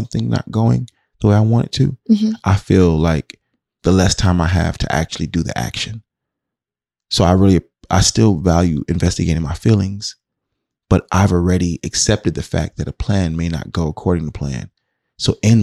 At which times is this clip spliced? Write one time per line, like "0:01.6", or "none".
none